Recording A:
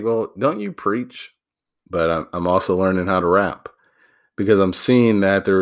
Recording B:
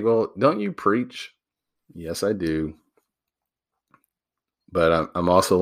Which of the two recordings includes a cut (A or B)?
A